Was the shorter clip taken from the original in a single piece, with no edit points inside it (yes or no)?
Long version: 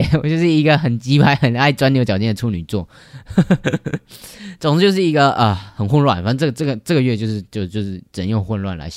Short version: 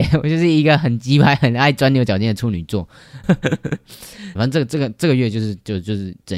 no